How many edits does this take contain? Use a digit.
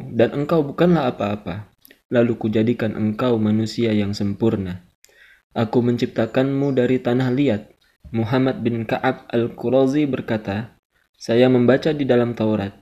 1